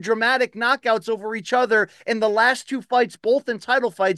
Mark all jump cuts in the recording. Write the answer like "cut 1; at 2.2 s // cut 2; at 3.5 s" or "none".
none